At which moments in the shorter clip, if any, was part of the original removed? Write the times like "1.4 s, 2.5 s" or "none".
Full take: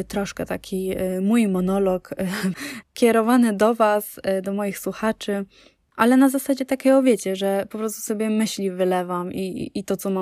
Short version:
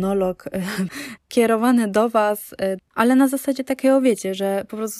2.8 s